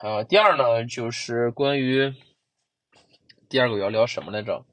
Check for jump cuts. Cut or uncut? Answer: uncut